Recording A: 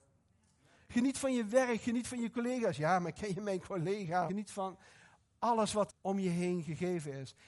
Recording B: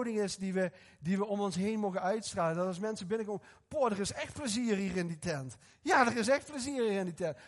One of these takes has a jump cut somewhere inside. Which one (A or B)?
A